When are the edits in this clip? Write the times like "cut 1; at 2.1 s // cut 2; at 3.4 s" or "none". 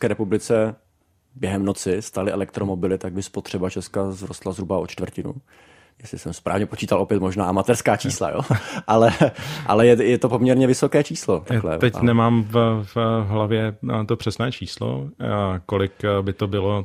none